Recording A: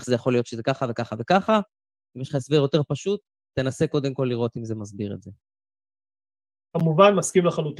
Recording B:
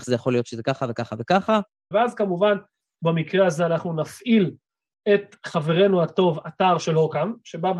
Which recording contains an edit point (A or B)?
B